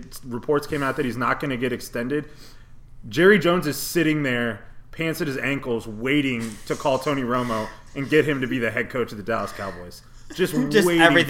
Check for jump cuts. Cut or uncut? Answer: uncut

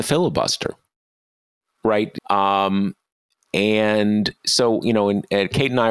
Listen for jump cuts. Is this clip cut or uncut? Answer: cut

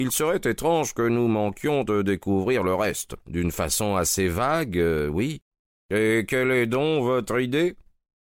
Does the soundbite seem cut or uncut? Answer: cut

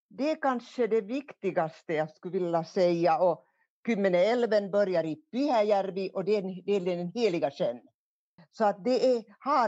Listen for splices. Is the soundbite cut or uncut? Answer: cut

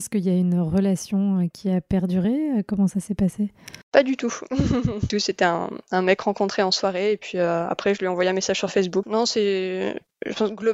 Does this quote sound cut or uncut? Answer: cut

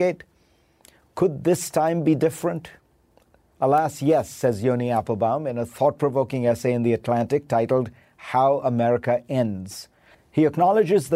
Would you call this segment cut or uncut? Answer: cut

